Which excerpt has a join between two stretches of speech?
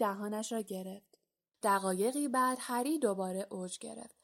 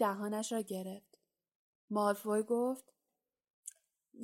first; 1 cut; at 1.5 s

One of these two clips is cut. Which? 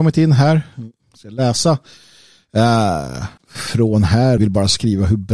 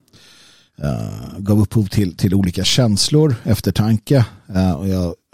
first; 2 cuts; at 3.4 s, 4.4 s

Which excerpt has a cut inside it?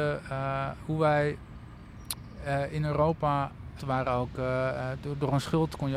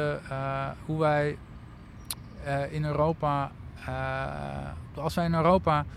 first; 1 cut; at 3.8 s

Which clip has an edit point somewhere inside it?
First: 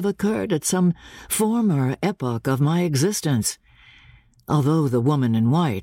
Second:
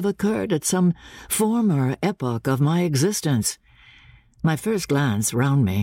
second; 1 cut; at 4.4 s

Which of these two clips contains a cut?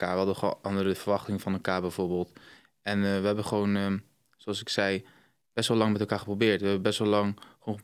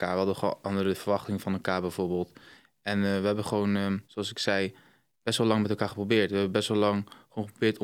second; 1 cut; at 4.0 s

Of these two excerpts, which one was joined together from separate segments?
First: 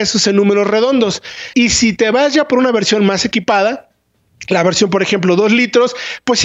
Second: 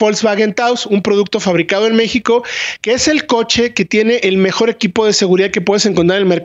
first; 1 cut; at 1.5 s

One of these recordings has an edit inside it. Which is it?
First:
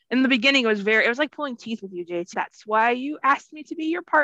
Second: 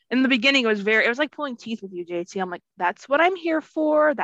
first; 1 cut; at 2.3 s

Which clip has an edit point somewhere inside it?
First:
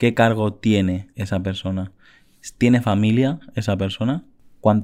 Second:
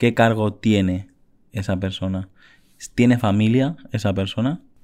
first; 1 cut; at 1.1 s

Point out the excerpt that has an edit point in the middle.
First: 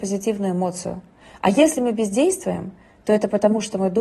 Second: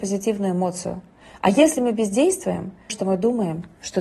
second; 1 cut; at 2.9 s

